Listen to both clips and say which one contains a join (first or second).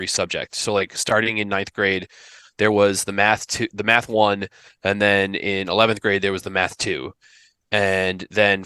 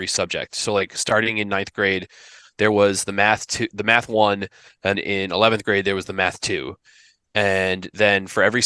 second